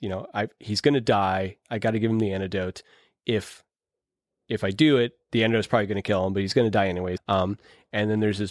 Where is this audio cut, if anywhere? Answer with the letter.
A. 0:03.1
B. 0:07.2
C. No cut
B